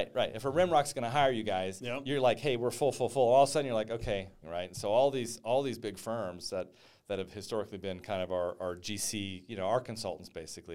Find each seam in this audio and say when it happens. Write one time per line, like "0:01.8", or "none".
0:04.4